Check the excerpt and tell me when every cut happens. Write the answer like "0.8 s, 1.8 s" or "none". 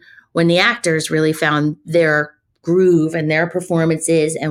none

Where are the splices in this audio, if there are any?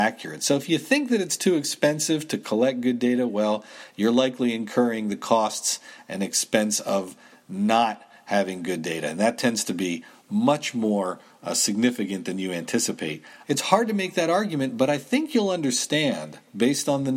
13.4 s

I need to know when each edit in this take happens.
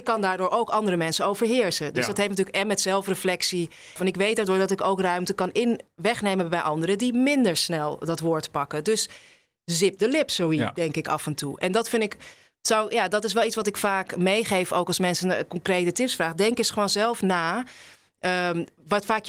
4.0 s

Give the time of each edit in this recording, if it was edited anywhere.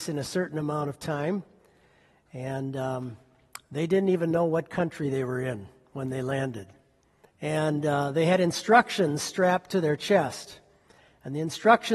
7.3 s

